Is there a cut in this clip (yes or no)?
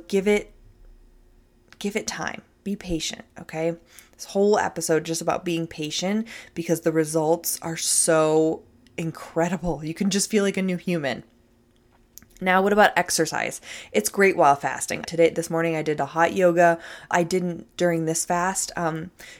yes